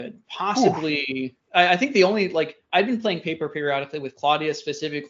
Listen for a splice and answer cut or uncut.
uncut